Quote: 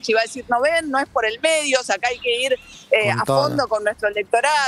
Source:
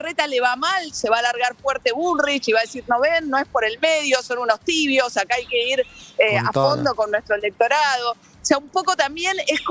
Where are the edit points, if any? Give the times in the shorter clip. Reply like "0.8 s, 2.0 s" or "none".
1.8 s